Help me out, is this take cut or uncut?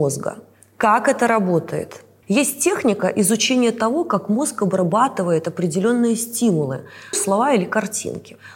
cut